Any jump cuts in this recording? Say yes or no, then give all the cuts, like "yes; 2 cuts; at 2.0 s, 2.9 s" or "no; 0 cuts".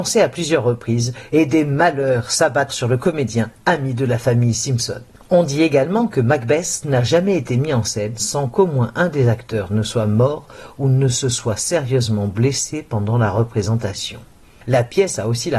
yes; 1 cut; at 2.7 s